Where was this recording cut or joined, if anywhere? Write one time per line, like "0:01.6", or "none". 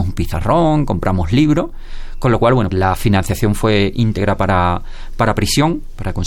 0:02.7